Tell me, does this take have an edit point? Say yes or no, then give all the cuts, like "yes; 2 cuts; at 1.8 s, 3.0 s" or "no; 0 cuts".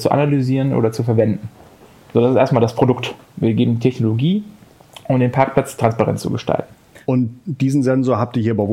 no; 0 cuts